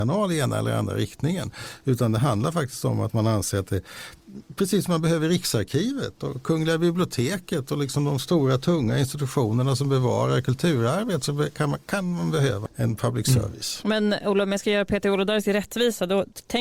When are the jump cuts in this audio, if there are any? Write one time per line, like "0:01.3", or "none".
0:12.7